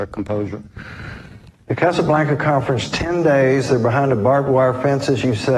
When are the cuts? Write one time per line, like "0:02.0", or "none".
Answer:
0:01.7